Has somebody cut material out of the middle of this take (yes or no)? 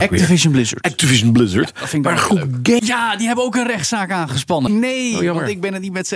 yes